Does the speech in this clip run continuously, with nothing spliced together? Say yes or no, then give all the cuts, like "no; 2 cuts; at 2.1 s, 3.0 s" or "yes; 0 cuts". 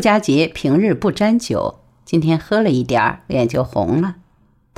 yes; 0 cuts